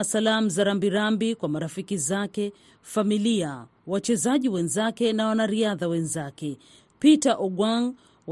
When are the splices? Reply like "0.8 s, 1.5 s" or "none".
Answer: 6.8 s